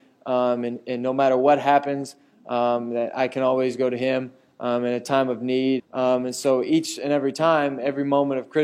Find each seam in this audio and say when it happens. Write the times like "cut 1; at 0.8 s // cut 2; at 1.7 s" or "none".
cut 1; at 5.8 s